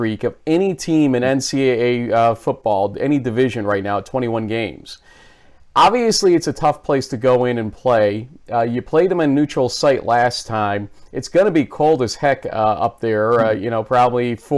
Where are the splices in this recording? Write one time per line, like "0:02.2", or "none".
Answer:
none